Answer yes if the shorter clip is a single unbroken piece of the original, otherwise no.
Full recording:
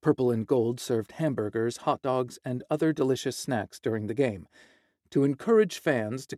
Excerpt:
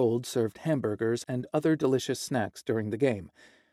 no